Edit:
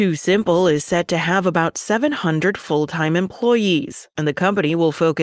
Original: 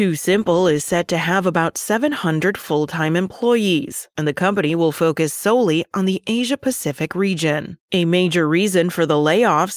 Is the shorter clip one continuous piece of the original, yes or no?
yes